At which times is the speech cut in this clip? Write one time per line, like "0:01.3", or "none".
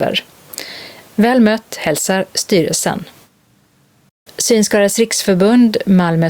0:01.0